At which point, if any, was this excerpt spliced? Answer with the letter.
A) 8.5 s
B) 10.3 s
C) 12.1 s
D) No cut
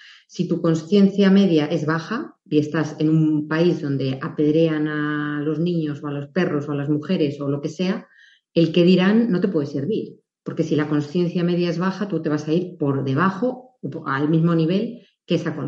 D